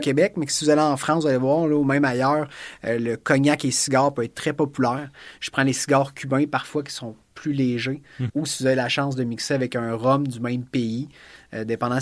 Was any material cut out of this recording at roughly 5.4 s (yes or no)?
no